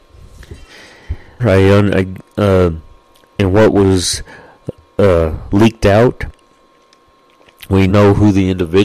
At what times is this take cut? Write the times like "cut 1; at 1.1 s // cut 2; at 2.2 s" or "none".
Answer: cut 1; at 1.4 s // cut 2; at 7.9 s